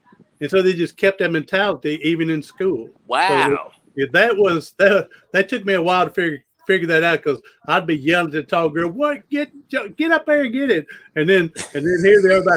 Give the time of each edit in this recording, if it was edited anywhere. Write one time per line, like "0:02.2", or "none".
0:03.0